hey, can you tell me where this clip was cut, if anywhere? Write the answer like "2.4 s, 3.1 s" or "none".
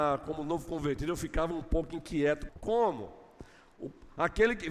2.5 s